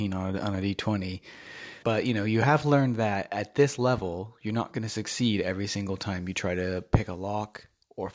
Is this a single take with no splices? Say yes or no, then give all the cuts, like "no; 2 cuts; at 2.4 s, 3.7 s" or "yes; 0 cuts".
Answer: no; 1 cut; at 1.8 s